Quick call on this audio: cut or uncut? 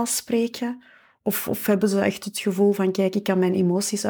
uncut